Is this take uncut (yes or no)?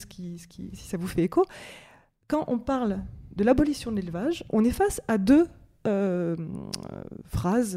yes